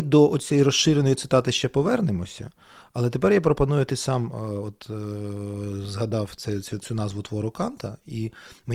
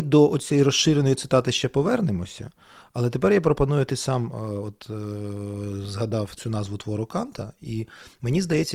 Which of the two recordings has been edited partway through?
second; 1 cut; at 6.4 s

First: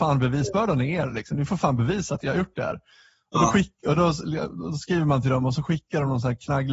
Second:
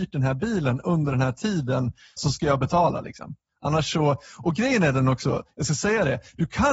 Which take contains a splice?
second; 1 cut; at 2.2 s

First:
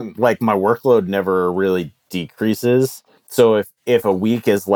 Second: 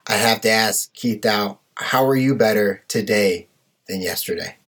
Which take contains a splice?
first; 1 cut; at 3.2 s

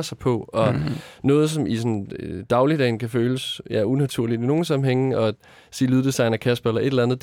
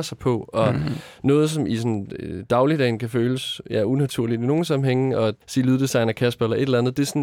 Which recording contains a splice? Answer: second; 1 cut; at 5.4 s

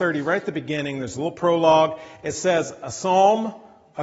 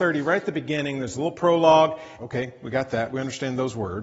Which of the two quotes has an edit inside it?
second; 1 cut; at 2.2 s

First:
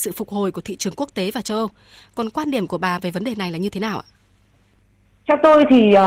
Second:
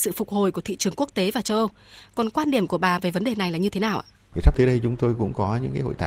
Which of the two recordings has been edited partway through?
second; 1 cut; at 4.3 s

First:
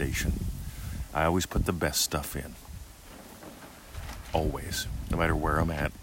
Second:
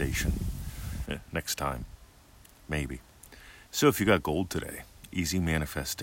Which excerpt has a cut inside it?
second; 2 cuts; at 1.1 s, 3.7 s

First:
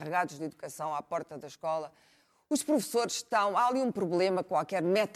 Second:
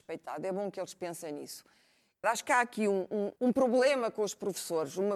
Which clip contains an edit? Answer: second; 2 cuts; at 2.2 s, 3.4 s

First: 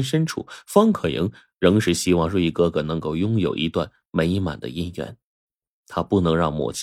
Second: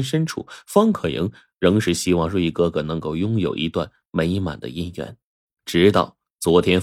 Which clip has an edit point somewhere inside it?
second; 1 cut; at 5.5 s

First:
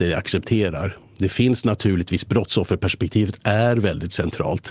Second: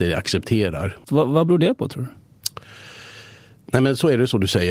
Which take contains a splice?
second; 1 cut; at 1.0 s

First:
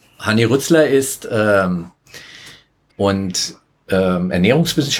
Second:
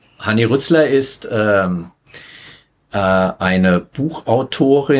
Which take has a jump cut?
first; 1 cut; at 2.9 s

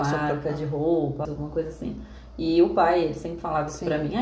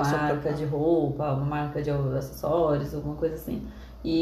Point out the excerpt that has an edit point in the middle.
first; 1 cut; at 1.3 s

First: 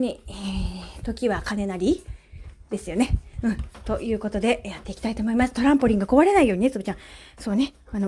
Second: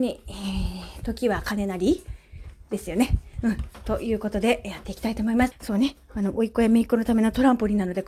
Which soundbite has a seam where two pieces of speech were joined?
second; 1 cut; at 5.5 s

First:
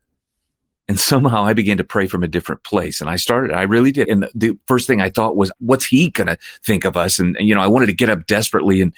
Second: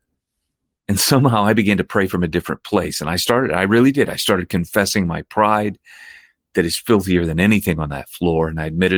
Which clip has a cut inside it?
first; 1 cut; at 4.1 s

